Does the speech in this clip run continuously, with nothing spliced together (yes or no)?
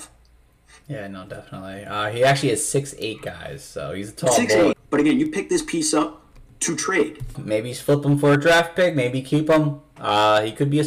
no